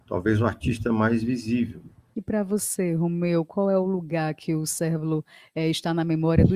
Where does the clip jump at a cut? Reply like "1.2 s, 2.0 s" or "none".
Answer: 2.1 s